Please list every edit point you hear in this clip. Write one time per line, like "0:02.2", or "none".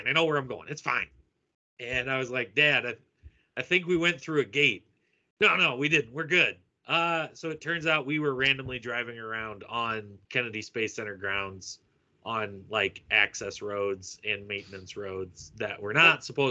0:10.2